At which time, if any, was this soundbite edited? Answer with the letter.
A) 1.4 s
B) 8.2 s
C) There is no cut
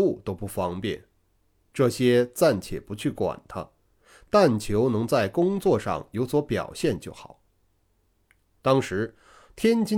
C